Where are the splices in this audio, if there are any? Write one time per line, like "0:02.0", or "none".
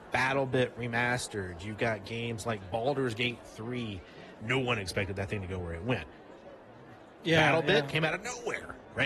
0:04.4